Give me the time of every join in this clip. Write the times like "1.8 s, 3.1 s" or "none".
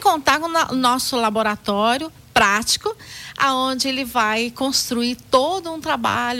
none